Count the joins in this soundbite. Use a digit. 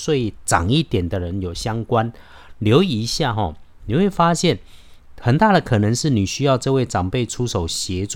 0